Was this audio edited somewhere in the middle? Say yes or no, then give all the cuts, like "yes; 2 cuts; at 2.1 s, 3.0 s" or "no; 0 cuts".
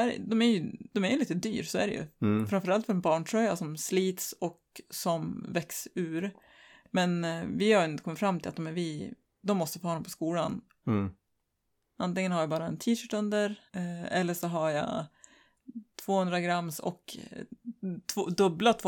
yes; 2 cuts; at 10.8 s, 13.7 s